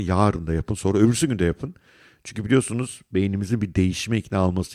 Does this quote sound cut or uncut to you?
uncut